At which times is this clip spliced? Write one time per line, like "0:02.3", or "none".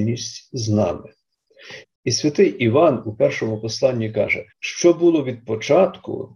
0:01.8
0:04.5